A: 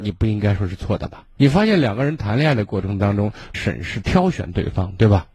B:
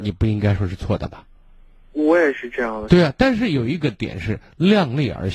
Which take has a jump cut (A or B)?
A